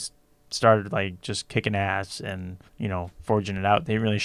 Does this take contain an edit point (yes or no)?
yes